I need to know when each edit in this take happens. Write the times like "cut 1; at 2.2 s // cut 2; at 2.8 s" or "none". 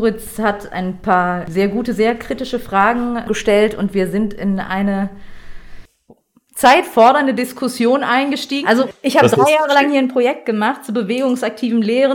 cut 1; at 8.6 s